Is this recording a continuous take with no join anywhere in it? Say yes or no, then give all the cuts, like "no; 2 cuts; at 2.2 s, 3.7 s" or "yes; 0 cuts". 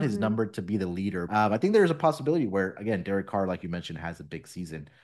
no; 1 cut; at 1.3 s